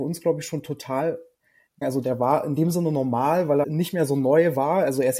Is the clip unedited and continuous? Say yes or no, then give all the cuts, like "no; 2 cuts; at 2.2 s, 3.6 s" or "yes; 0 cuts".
no; 2 cuts; at 1.8 s, 3.6 s